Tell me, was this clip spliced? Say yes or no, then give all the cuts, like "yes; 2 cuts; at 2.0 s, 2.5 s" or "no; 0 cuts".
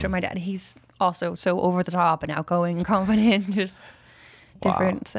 no; 0 cuts